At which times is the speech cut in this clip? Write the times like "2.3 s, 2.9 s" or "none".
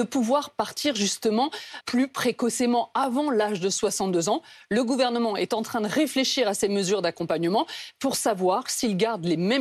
1.8 s